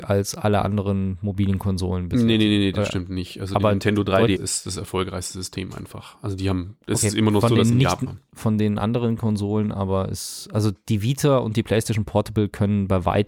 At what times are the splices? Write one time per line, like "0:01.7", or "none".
0:04.4